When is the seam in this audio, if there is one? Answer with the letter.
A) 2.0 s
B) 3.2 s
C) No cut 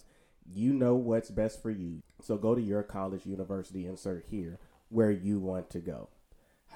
A